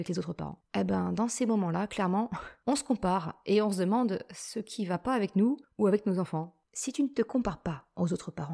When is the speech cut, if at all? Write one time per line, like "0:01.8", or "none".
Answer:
0:06.6